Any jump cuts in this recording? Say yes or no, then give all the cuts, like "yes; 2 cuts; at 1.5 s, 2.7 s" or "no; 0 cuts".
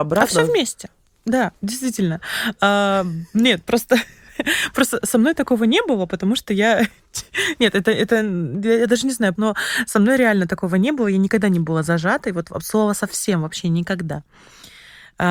yes; 1 cut; at 9.3 s